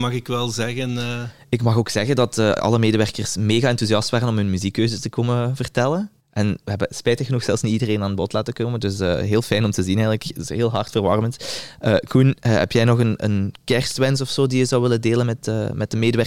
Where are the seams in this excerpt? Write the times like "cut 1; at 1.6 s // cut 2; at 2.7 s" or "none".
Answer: cut 1; at 6.2 s

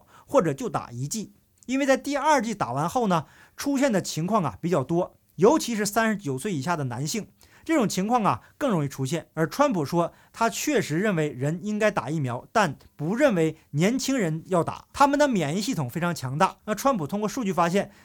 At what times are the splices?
cut 1; at 14.9 s // cut 2; at 16.6 s

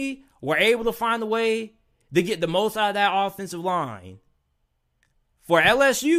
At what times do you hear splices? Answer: none

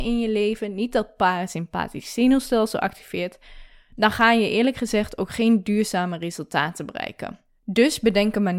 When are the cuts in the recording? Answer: cut 1; at 7.5 s

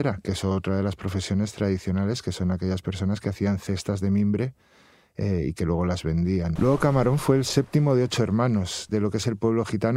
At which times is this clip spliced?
cut 1; at 6.6 s // cut 2; at 8.9 s

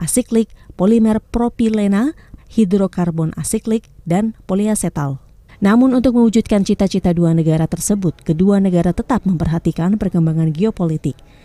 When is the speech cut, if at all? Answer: cut 1; at 2.4 s // cut 2; at 5.5 s

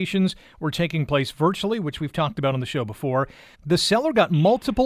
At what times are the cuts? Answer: cut 1; at 3.5 s

